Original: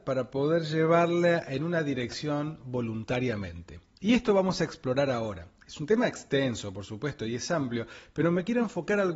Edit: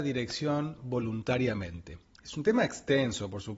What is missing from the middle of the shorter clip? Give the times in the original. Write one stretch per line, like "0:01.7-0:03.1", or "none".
0:04.0-0:05.6

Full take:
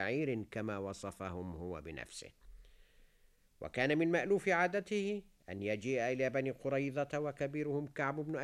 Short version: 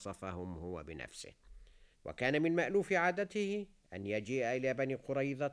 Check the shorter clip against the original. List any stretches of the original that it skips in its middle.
0:02.9-0:03.5

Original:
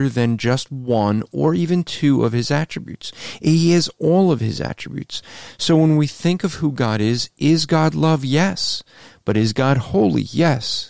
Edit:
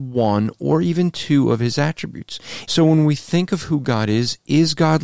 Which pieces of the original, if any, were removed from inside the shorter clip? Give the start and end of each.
0:03.4-0:05.6

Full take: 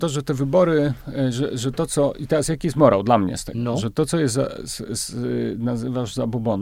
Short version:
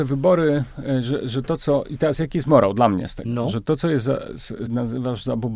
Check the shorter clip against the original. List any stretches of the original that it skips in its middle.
0:05.0-0:05.6

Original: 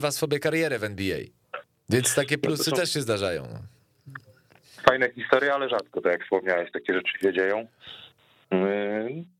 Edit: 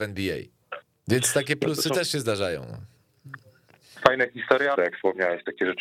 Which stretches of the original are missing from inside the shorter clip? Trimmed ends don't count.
0:05.6-0:06.0

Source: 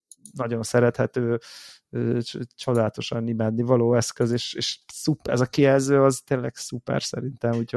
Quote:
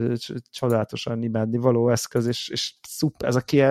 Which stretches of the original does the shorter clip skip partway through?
none

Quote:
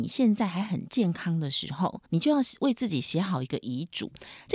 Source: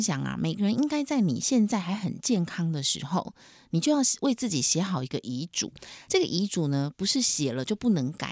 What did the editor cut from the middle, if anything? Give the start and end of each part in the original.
0:03.4-0:03.7

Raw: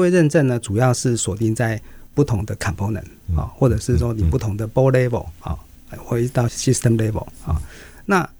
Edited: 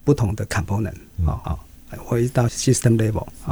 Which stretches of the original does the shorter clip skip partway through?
0:03.5-0:05.4

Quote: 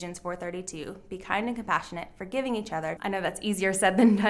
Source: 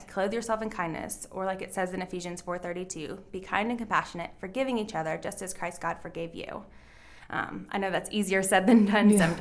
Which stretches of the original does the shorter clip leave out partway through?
0:05.2-0:07.7

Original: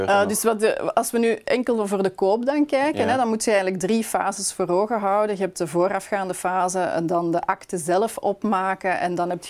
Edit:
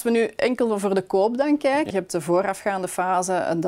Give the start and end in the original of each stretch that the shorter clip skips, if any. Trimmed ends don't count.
0:03.0-0:05.4

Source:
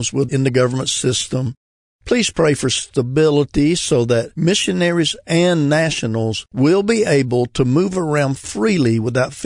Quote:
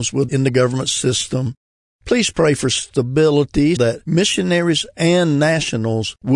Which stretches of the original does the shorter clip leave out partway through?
0:03.8-0:04.1

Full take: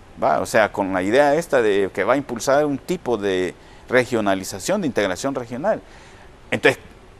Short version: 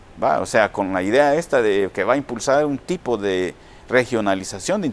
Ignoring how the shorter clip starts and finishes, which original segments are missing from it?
none

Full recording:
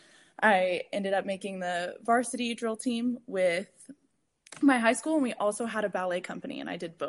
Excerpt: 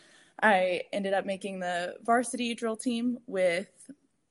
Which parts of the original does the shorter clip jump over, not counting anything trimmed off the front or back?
none

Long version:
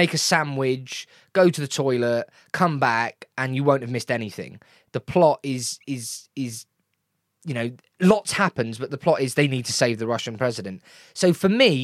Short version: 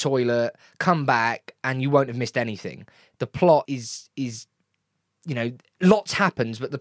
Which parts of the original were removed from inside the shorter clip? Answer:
0:05.4-0:05.8

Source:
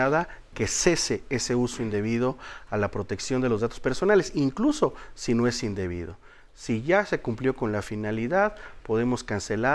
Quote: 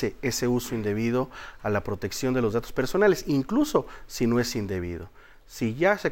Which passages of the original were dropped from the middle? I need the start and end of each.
none

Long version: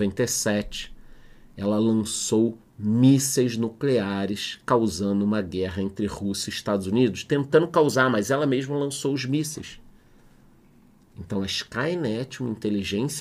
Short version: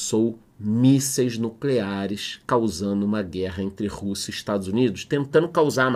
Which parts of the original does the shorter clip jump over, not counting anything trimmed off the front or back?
none

